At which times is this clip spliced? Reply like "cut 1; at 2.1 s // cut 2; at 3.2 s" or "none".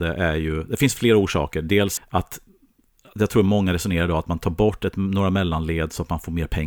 cut 1; at 2.0 s